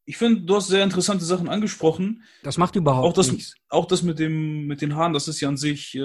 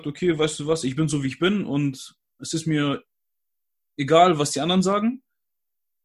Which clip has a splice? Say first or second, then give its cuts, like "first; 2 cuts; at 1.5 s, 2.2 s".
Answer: first; 1 cut; at 2.4 s